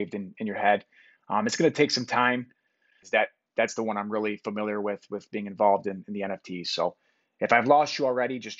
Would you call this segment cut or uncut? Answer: cut